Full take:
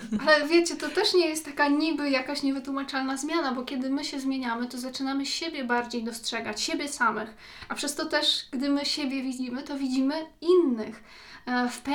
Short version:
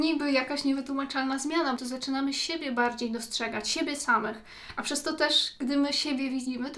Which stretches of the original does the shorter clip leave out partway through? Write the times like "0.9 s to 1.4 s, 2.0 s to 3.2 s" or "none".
3.5 s to 4.7 s